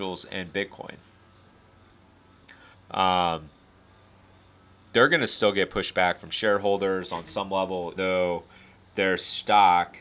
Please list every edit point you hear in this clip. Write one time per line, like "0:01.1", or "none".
0:02.7
0:08.0